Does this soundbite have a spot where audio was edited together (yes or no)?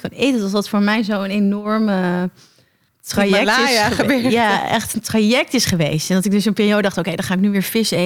no